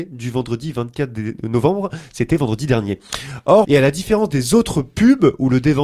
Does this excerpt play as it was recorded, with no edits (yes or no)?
no